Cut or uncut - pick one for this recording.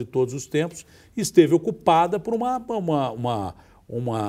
uncut